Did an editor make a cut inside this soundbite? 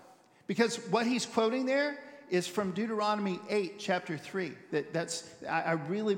yes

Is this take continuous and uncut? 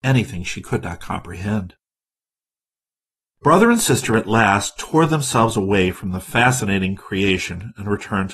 yes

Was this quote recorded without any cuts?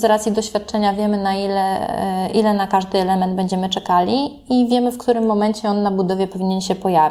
yes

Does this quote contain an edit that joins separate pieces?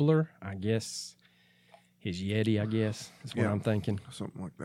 no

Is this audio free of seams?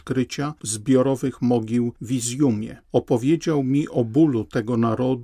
no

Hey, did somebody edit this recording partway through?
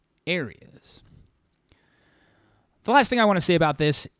no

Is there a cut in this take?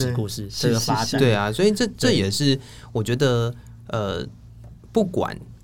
no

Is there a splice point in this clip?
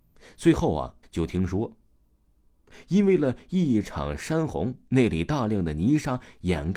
yes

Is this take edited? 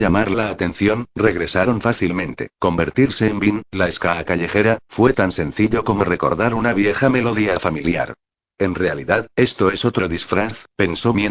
yes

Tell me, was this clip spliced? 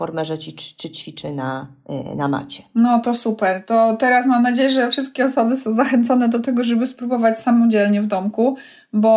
no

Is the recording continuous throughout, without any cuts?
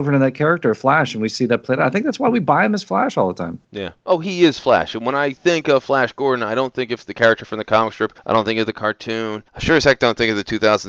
yes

